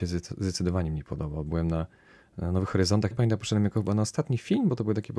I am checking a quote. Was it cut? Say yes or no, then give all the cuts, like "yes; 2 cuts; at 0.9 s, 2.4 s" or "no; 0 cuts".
yes; 1 cut; at 3.1 s